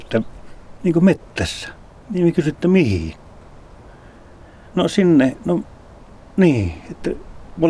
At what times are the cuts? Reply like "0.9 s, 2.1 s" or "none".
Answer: none

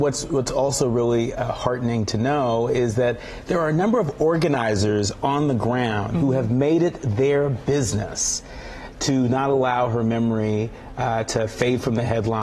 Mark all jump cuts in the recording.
none

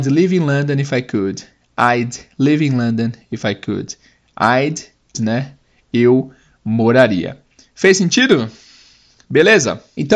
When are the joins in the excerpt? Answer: 5.1 s

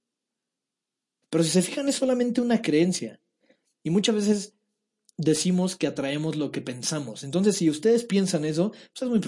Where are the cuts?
1.2 s

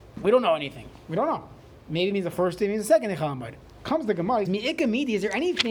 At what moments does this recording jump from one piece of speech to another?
4.4 s

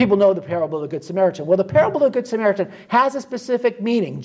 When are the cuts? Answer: none

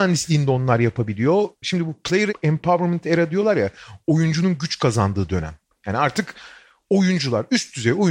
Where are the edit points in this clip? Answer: 1.6 s

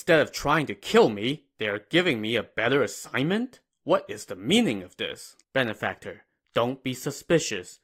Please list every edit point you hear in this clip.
5.4 s

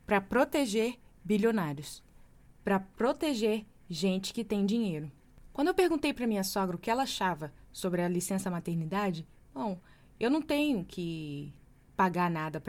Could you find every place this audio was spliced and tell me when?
9.5 s

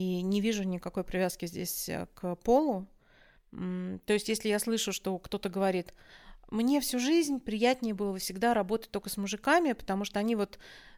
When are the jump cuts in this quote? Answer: 3.4 s

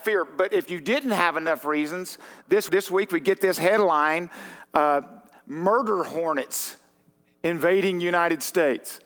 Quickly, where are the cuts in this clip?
2.7 s

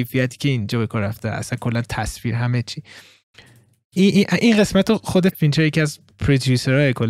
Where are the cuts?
5.3 s

